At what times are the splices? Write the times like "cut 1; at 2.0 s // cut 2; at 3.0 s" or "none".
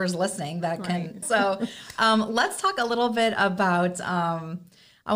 cut 1; at 1.2 s

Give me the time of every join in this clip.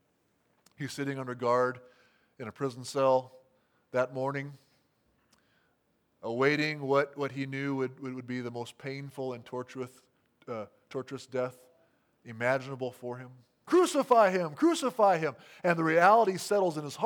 cut 1; at 13.7 s

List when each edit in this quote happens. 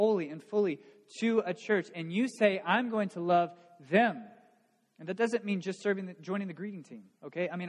none

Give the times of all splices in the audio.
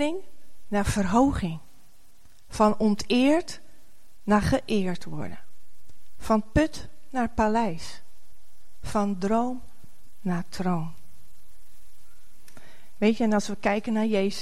none

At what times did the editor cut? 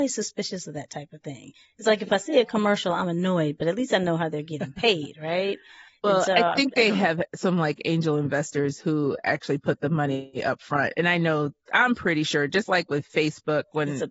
none

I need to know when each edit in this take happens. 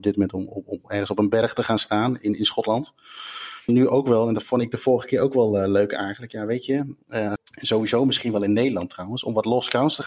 cut 1; at 3.7 s // cut 2; at 7.4 s

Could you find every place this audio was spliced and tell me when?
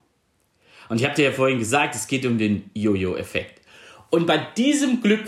none

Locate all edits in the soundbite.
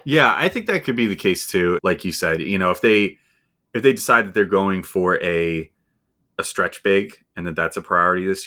cut 1; at 1.8 s

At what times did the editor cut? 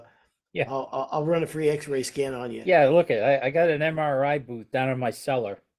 none

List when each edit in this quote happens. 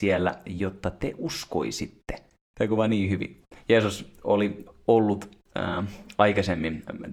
cut 1; at 2.5 s

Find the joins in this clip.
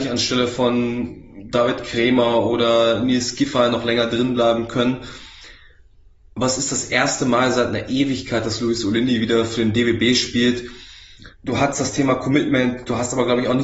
cut 1; at 11.3 s

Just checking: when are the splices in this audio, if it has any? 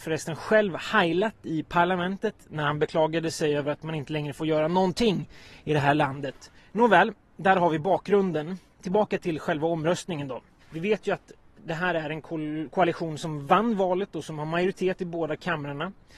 cut 1; at 10.6 s

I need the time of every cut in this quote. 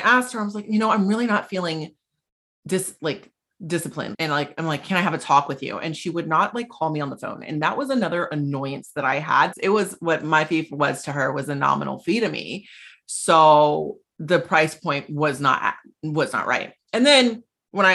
cut 1; at 4.1 s // cut 2; at 9.5 s

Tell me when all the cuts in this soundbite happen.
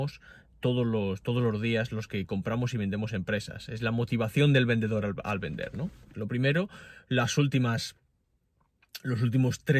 cut 1; at 6.1 s

